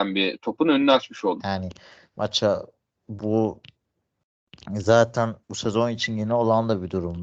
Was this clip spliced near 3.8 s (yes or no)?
no